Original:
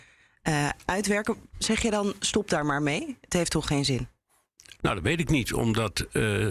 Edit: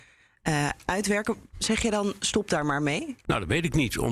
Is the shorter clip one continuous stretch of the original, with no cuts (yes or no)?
no